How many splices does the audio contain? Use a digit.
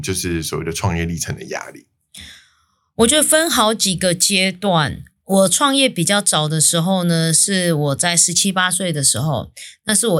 0